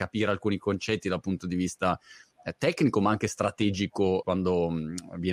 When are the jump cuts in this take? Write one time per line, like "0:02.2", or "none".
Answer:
0:04.2